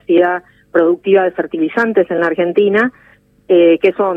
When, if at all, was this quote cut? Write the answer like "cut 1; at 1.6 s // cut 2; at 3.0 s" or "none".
none